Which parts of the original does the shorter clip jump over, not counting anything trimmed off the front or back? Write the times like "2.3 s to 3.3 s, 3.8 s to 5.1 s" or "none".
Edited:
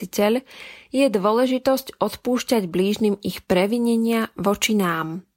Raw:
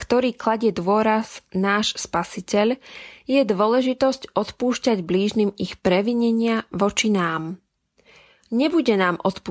none

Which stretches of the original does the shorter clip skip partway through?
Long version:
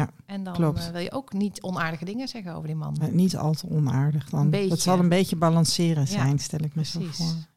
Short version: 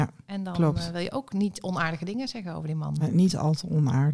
none

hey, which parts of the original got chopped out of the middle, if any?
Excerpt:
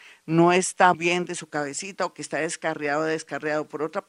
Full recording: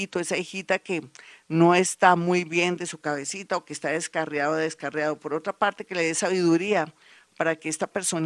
2.2 s to 2.4 s

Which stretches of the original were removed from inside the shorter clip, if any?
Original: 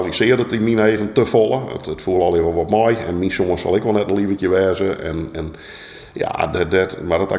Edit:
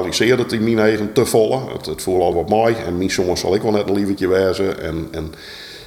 2.3 s to 2.5 s

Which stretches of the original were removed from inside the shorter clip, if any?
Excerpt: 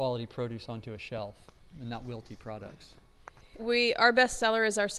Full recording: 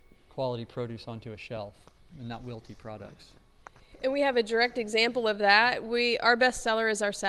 4.0 s to 5.8 s

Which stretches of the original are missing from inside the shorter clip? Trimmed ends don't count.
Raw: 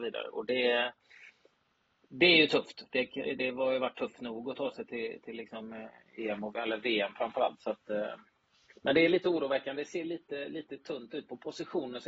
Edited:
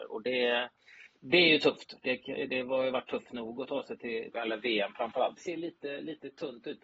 1.4 s to 2.0 s, 5.2 s to 6.5 s, 7.6 s to 9.8 s

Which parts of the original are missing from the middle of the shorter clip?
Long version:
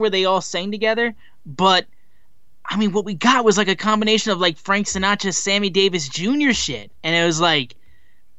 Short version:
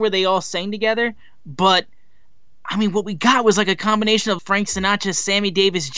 4.4 s to 4.6 s

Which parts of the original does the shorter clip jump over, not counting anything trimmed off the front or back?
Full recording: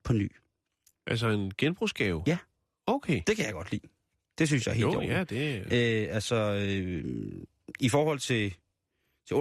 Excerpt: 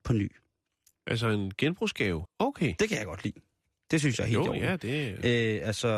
2.2 s to 2.7 s

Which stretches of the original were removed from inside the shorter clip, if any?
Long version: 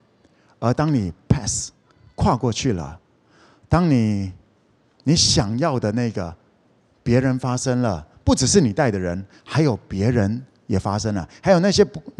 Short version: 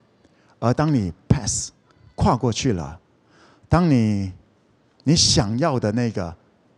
none

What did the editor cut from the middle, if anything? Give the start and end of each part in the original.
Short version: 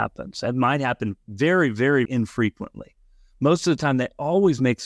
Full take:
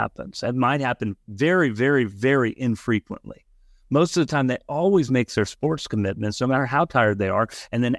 2.1 s to 2.6 s

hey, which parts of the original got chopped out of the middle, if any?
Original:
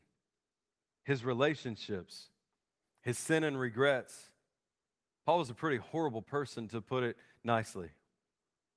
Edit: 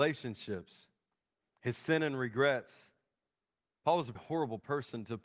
5.6 s to 5.8 s

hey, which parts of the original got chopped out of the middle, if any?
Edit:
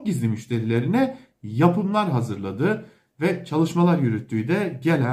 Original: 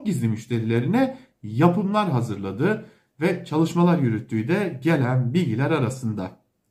none

